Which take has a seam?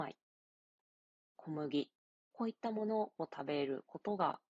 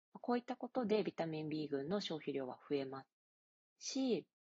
first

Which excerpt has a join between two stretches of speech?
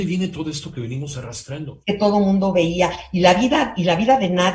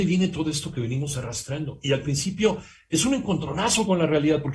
first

